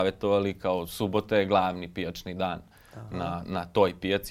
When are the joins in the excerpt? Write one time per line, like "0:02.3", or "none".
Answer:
none